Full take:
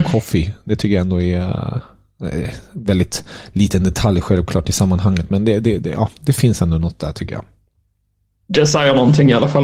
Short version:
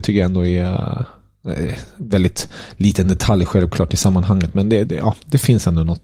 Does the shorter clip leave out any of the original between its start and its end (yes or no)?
yes